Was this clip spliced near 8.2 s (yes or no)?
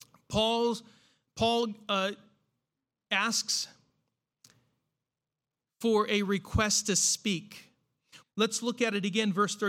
yes